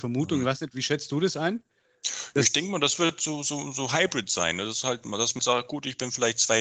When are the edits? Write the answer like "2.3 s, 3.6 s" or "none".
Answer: 5.4 s

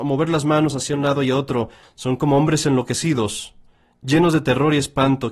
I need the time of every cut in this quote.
1.8 s

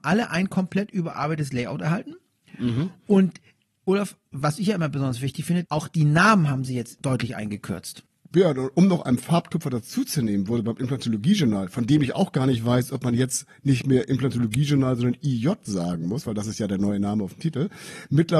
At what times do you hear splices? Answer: 5.6 s

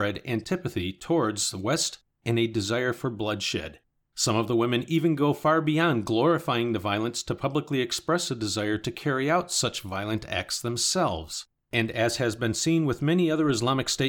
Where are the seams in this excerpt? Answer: none

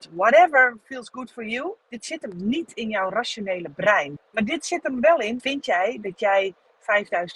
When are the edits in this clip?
1.8 s, 4.2 s, 5.4 s

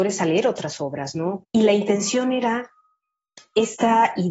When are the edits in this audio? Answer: 1.4 s

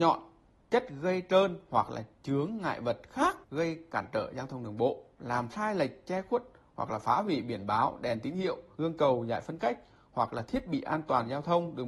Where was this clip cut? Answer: 5.2 s, 8.7 s

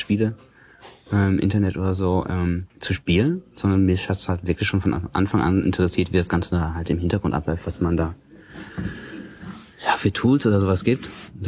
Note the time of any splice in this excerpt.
2.7 s

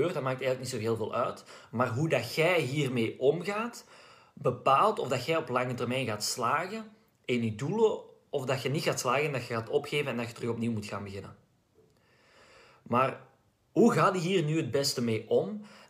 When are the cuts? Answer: none

